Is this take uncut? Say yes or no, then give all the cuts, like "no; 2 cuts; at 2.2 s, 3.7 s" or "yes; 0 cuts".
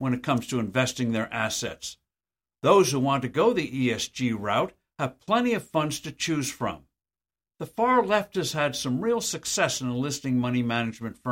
yes; 0 cuts